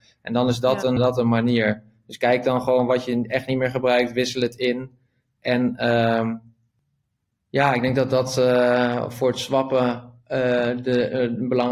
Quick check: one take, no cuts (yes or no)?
no